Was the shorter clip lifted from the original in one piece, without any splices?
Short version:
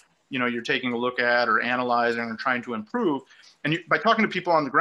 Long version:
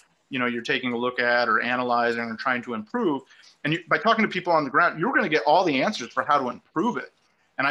yes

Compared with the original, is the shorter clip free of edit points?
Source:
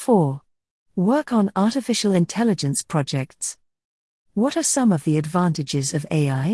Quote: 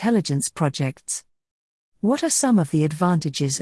yes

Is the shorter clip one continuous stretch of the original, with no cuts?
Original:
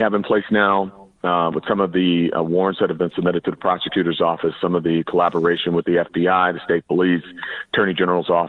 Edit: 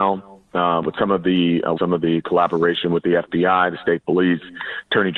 no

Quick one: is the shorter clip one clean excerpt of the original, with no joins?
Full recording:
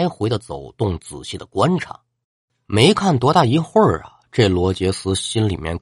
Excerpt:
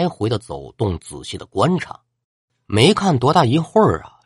yes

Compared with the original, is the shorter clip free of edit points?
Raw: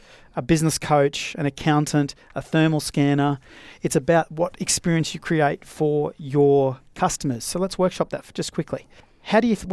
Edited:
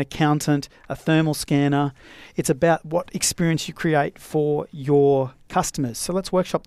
yes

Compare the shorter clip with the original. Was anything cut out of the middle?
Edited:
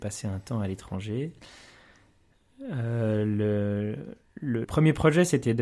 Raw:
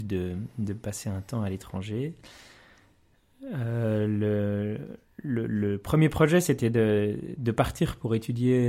yes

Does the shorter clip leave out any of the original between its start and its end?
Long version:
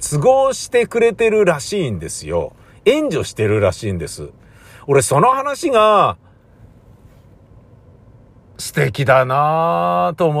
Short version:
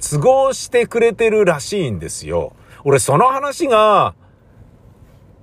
yes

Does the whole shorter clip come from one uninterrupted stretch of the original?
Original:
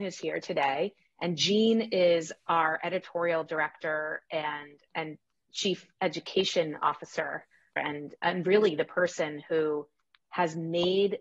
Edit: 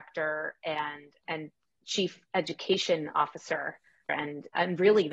yes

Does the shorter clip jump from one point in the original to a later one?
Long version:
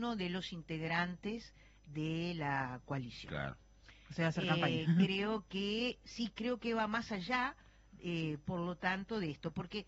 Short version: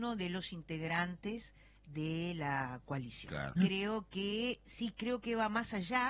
yes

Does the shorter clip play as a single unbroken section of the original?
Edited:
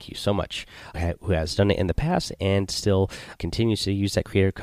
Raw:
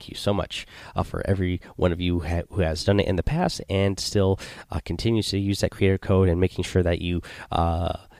no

